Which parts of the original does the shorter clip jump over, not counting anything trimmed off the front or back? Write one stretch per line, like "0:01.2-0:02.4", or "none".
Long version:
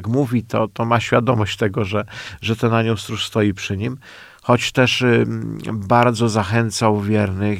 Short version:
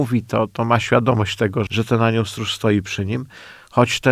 0:01.9-0:02.4